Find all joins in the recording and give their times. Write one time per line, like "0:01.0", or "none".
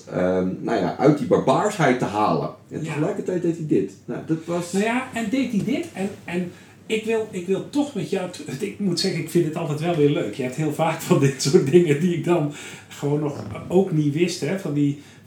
none

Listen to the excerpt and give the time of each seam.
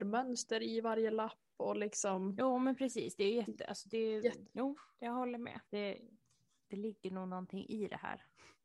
0:04.4
0:05.7

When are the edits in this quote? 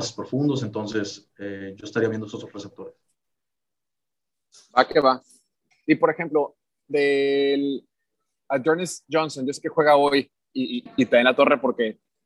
0:05.7
0:10.9

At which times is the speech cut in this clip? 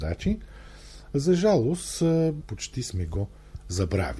0:02.4

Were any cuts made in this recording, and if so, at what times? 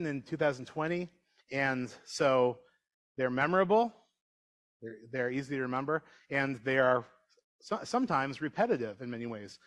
0:01.4

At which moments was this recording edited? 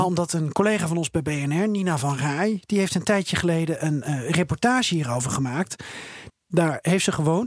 0:06.3

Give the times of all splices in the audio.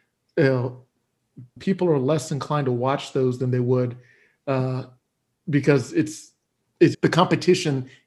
0:01.6
0:06.9

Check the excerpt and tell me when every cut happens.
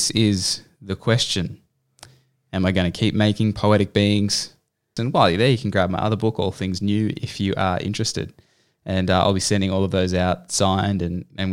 0:05.0

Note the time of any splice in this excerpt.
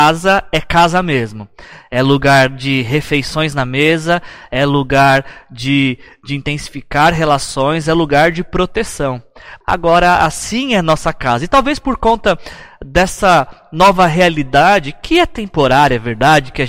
0:09.6

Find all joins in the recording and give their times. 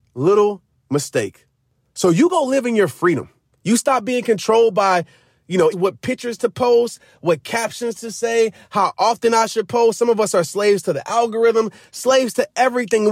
0:05.7

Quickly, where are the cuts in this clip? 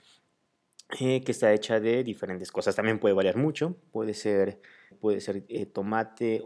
0:04.9

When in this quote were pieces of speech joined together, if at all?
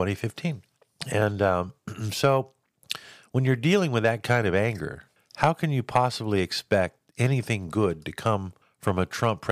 none

